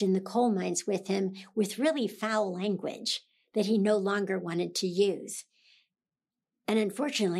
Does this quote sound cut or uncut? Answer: uncut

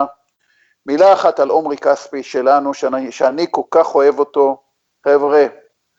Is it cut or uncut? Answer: uncut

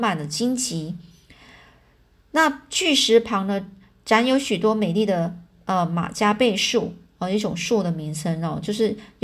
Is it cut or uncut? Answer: uncut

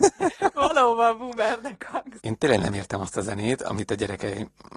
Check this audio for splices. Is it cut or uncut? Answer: cut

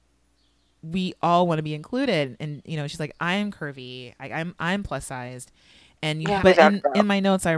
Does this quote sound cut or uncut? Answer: cut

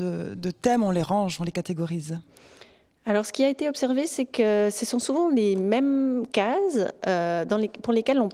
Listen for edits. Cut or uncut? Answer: uncut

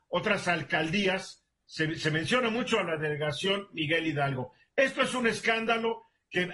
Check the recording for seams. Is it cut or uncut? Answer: cut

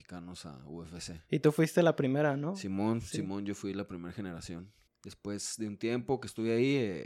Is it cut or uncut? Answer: cut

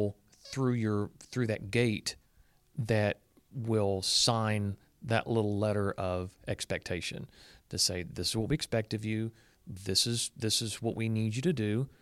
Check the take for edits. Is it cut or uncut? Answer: uncut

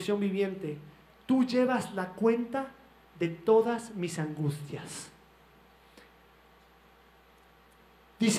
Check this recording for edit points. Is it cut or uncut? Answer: uncut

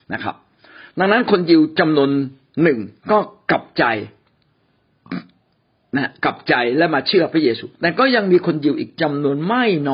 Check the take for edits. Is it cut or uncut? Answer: cut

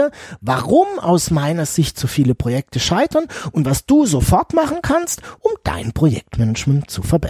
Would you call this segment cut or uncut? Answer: uncut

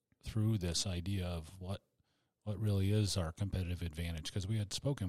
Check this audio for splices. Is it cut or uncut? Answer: uncut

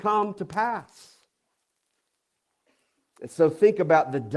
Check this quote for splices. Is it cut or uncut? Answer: uncut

